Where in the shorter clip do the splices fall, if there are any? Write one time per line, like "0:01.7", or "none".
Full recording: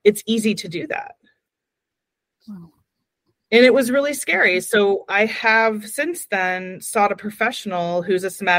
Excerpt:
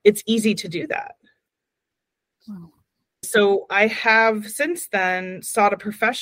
0:03.2

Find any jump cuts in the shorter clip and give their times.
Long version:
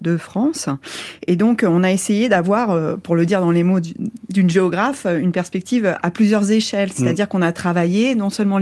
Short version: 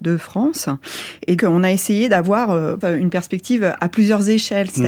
0:01.4
0:02.8

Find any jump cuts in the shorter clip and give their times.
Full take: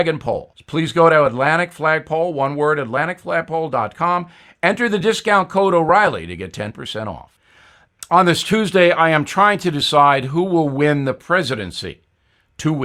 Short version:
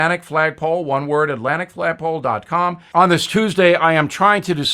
0:02.9

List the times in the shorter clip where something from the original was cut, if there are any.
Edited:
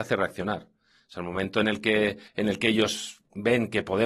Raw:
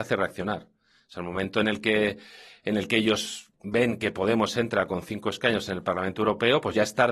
0:02.3

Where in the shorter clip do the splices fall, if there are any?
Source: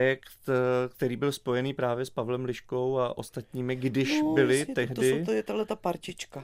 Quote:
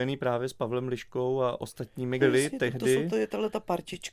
0:02.2

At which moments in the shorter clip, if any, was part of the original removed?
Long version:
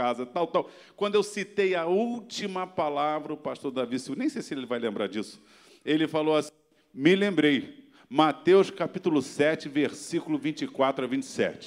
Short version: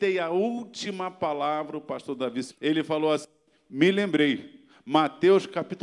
0:02.5

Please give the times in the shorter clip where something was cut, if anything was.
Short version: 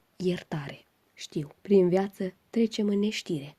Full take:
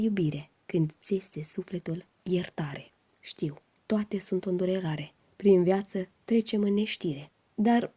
0:01.6

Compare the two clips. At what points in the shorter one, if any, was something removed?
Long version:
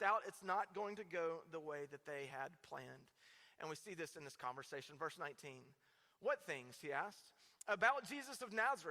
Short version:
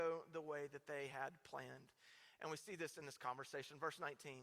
none

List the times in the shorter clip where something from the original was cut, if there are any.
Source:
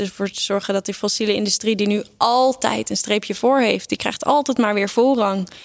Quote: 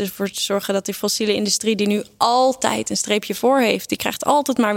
none

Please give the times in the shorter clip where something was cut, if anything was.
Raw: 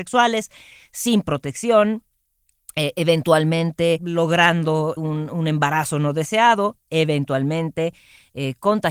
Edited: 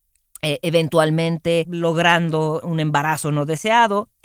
0:02.6

